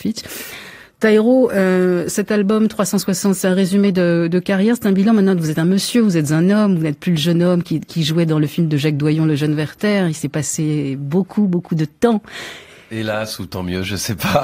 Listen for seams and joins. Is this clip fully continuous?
yes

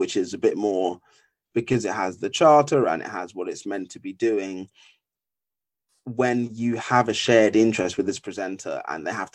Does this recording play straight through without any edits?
yes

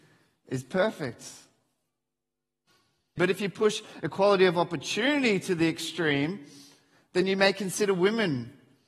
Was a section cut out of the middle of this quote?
yes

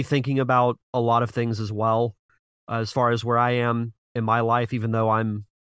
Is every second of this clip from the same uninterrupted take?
yes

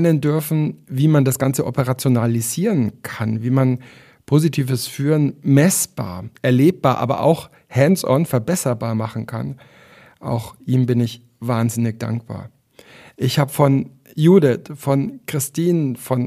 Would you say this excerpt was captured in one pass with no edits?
yes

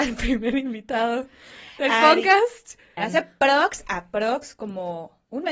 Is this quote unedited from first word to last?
no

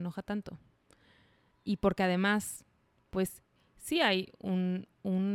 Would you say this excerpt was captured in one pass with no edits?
yes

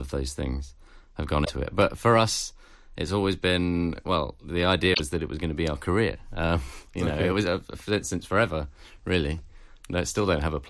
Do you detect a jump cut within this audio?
no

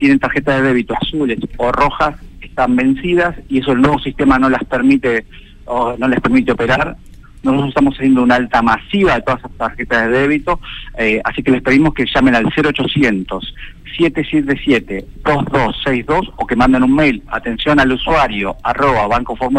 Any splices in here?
no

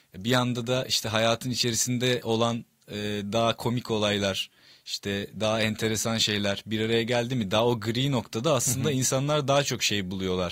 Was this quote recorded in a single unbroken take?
yes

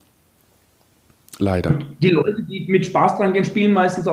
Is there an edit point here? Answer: no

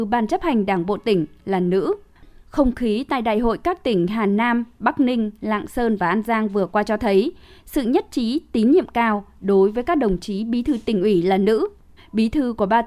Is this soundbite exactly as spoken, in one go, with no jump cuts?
no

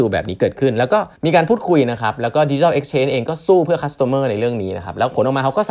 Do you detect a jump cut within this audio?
yes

